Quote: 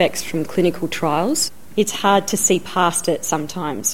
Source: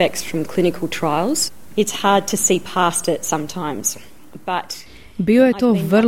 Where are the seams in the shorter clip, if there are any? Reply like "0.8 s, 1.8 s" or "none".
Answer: none